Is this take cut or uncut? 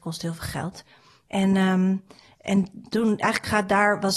cut